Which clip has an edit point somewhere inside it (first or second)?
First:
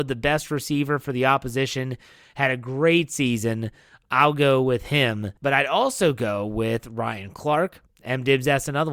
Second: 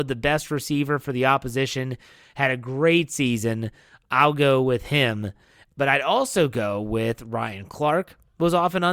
first